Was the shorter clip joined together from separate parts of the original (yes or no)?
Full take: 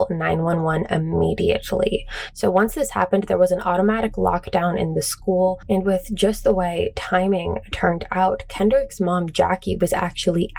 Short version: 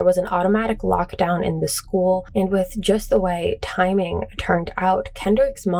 no